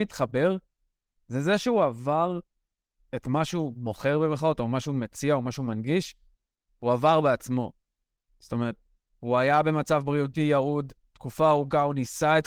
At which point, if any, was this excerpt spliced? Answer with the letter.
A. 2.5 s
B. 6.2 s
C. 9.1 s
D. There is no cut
D